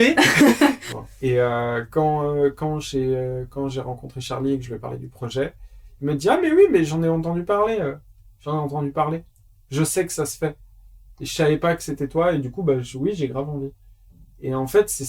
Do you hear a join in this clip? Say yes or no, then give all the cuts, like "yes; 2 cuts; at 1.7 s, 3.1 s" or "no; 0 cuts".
no; 0 cuts